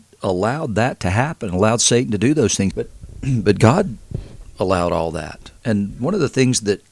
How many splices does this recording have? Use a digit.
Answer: 2